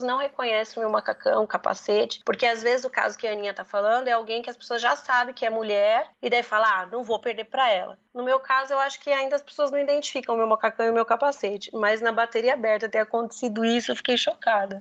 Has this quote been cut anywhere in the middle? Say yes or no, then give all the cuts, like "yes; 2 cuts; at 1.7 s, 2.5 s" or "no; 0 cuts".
no; 0 cuts